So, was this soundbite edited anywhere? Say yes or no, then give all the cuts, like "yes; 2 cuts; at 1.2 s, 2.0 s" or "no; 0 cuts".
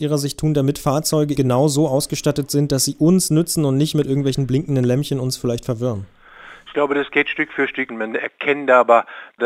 yes; 2 cuts; at 1.4 s, 7.9 s